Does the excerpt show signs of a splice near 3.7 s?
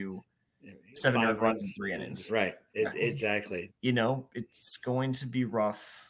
yes; 2 cuts; at 2.3 s, 3.7 s

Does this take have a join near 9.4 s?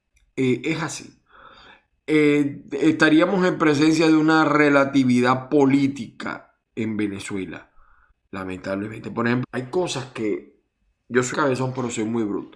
yes; 2 cuts; at 9.4 s, 11.3 s

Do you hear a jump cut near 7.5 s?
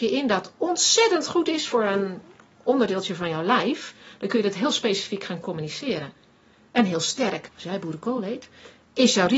yes; 1 cut; at 7.5 s

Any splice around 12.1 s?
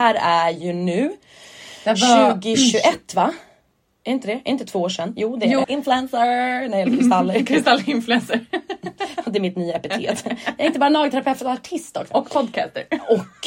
yes; 2 cuts; at 5.6 s, 12.1 s

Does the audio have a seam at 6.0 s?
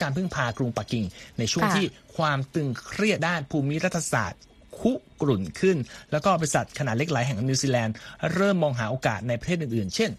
no; 1 cut; at 3.2 s

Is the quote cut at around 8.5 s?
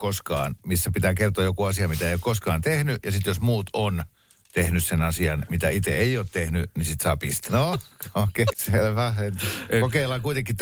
yes; 2 cuts; at 7.5 s, 8.5 s

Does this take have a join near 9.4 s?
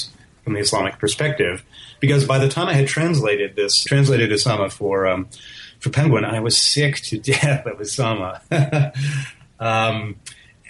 no; 1 cut; at 3.9 s

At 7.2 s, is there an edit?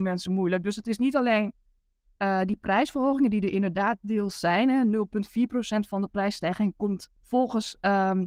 yes; 1 cut; at 7.2 s

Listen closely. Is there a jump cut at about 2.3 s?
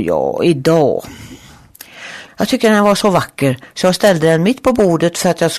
yes; 1 cut; at 2.3 s

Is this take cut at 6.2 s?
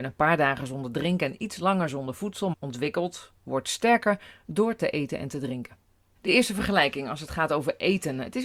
yes; 2 cuts; at 2.5 s, 6.2 s

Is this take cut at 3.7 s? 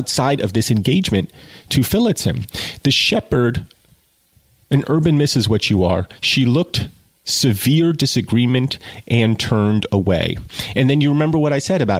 no; 0 cuts

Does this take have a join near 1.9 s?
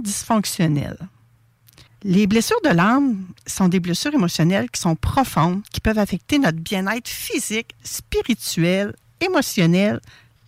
yes; 2 cuts; at 1.9 s, 7.8 s

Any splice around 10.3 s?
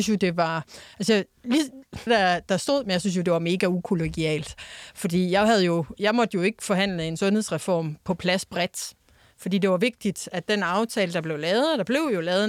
no; 1 cut; at 2.1 s

